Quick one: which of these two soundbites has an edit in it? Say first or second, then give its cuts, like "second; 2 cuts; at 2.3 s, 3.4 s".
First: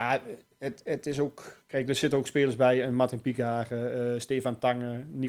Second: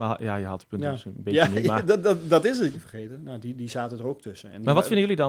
second; 1 cut; at 2.7 s